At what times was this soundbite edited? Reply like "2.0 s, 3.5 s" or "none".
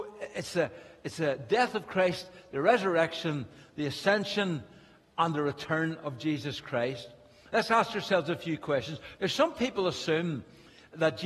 9.2 s